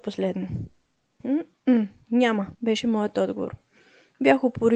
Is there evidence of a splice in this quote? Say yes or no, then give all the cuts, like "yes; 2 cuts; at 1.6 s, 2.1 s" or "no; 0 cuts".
yes; 2 cuts; at 1.2 s, 2.5 s